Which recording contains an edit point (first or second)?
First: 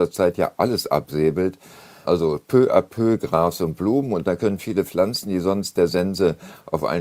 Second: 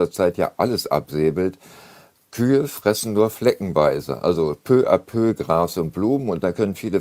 first